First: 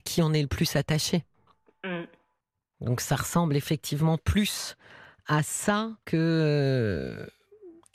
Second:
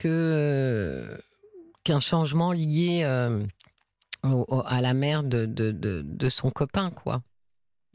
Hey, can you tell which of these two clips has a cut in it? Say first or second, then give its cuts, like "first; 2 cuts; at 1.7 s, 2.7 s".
first; 1 cut; at 6.0 s